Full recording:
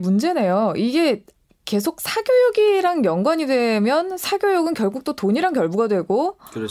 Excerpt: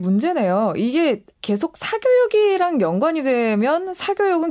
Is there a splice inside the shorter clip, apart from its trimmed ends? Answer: yes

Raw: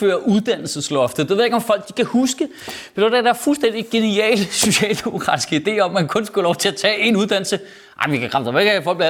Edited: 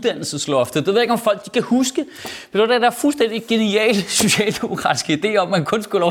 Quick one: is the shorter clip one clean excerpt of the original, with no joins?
yes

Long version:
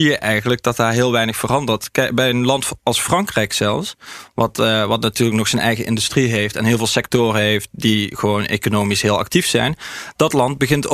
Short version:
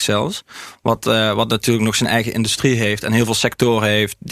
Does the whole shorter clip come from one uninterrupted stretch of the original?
yes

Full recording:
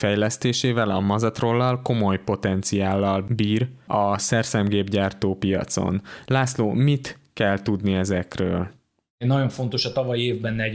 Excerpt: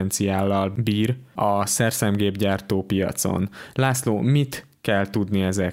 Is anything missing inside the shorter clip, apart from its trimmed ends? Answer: no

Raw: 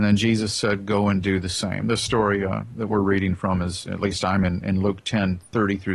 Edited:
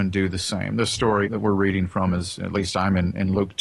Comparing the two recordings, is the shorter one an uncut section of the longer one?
no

